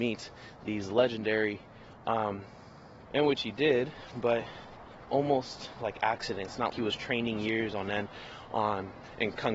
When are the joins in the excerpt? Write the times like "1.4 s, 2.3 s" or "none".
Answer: 3.1 s, 6.7 s